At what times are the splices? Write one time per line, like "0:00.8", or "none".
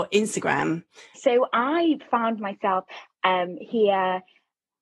0:01.1